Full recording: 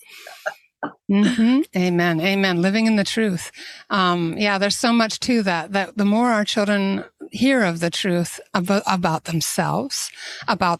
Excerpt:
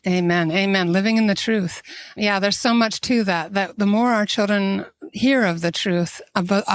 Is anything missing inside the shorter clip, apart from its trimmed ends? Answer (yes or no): yes